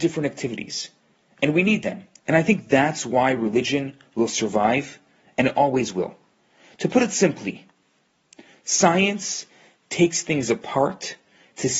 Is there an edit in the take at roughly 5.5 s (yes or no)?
no